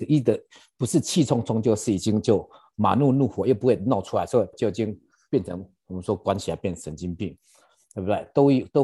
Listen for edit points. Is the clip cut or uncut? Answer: cut